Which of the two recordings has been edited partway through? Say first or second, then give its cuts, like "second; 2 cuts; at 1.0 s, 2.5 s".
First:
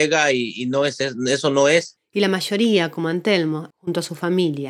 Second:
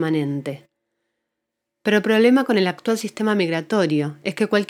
first; 2 cuts; at 2.0 s, 3.7 s